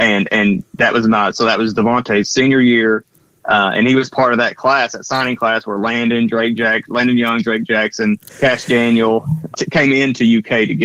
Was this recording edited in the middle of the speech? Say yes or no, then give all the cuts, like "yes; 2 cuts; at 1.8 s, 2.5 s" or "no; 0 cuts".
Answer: yes; 2 cuts; at 8.3 s, 9.5 s